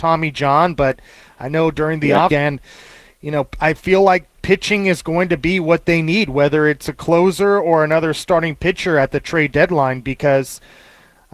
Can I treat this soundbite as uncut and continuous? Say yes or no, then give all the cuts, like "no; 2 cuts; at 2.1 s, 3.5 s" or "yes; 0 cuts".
no; 1 cut; at 2.3 s